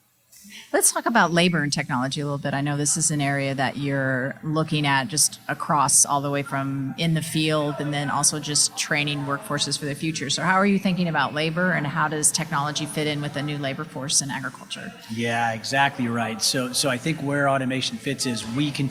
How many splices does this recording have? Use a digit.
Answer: 0